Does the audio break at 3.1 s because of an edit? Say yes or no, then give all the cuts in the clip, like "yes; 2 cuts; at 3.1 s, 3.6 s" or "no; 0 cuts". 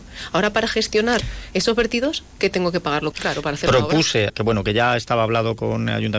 yes; 2 cuts; at 3.1 s, 4.3 s